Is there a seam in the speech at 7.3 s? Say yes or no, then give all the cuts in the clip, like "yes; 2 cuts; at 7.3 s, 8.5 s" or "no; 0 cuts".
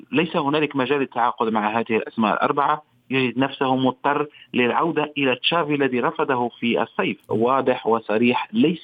yes; 1 cut; at 7.3 s